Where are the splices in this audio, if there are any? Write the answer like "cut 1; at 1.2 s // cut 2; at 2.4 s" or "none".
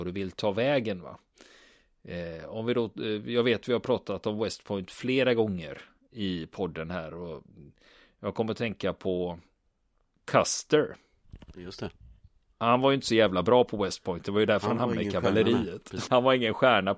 cut 1; at 16.1 s